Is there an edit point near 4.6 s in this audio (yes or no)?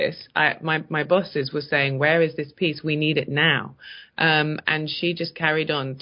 yes